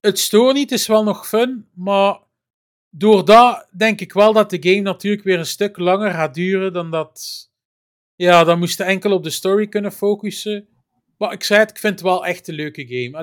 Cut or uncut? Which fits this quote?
uncut